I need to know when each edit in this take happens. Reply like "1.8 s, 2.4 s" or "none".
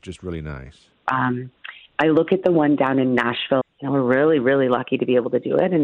1.1 s, 3.6 s